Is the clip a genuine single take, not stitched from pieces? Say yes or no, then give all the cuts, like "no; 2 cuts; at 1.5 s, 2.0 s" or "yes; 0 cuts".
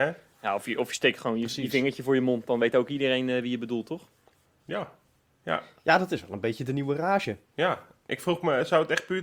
yes; 0 cuts